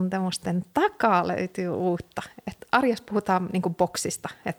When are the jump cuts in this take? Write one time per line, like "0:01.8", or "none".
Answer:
none